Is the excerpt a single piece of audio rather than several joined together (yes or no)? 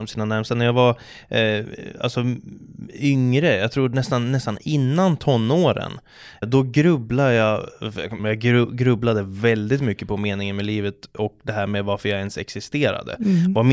no